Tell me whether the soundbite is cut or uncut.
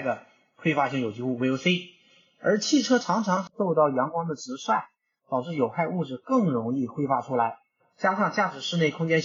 uncut